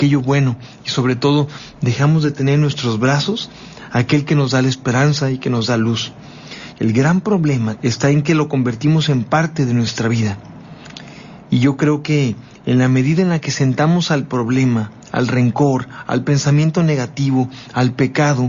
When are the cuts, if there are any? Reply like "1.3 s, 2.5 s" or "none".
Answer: 6.7 s, 7.8 s